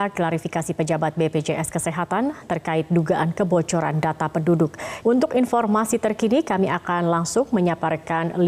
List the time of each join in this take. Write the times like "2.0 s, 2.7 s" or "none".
5.0 s